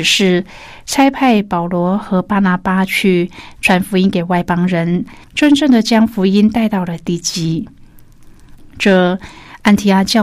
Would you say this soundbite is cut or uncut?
cut